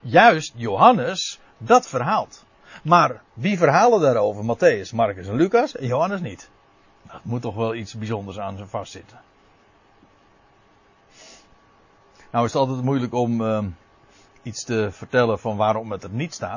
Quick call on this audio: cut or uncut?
uncut